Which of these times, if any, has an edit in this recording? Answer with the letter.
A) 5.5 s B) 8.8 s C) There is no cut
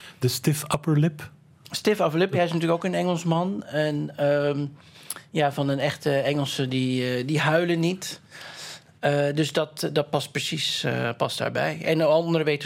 C